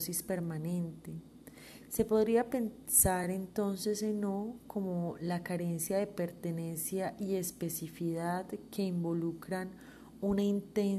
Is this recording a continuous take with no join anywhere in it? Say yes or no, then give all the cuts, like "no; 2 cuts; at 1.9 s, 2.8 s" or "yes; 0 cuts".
yes; 0 cuts